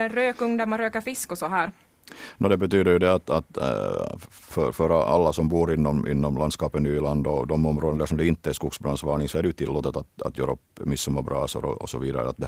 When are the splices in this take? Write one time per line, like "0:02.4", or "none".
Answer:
none